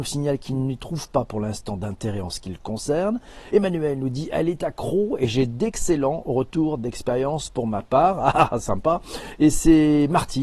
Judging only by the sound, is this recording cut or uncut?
uncut